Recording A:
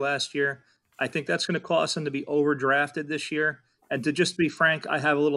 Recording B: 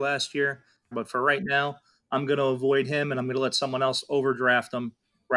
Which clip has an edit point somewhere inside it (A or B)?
B